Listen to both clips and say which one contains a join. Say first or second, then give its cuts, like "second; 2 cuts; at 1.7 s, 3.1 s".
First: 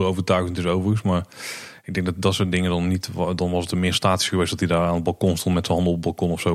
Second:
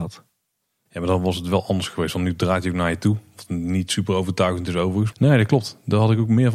second; 1 cut; at 5.1 s